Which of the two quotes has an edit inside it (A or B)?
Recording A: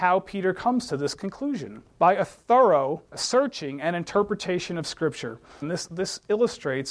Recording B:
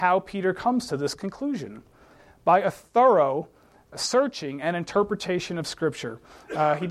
A